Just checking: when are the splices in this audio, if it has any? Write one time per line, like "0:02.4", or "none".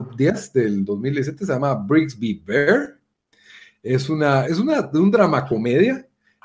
0:04.4